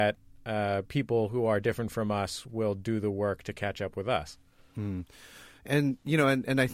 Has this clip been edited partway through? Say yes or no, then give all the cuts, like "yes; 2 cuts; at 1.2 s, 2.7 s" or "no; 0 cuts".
no; 0 cuts